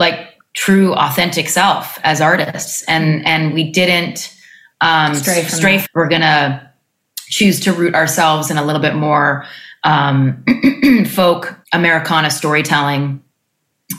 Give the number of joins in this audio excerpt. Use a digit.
2